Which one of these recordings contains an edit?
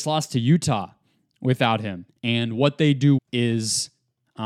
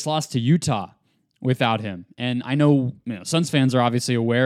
first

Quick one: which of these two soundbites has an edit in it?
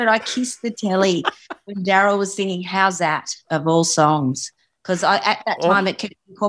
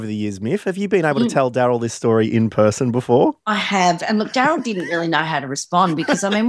second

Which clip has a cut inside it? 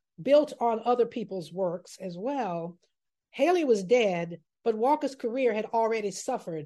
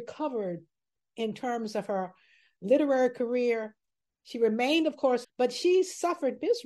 second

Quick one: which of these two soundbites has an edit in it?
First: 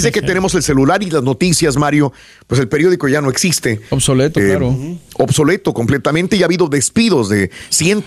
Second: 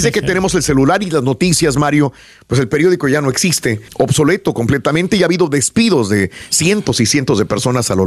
second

